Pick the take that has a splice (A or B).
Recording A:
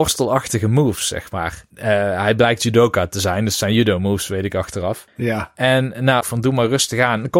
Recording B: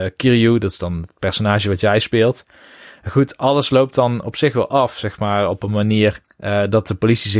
A